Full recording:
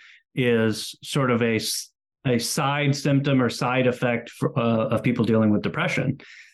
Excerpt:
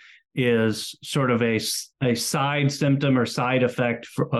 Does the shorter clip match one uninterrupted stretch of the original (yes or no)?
no